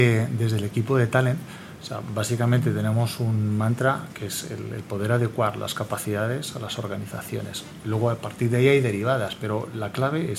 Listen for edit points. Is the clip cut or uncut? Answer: uncut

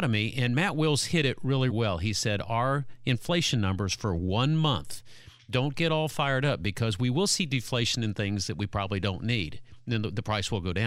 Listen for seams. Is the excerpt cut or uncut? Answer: cut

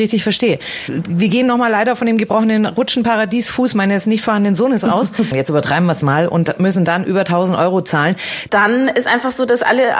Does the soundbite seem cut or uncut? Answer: cut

